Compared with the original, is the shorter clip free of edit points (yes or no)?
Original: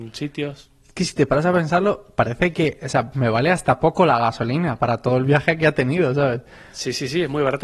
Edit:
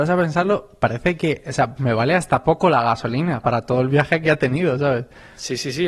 yes